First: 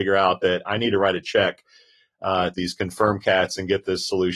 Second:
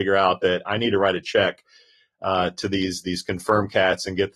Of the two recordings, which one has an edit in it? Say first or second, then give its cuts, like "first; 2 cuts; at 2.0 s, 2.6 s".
first; 1 cut; at 2.5 s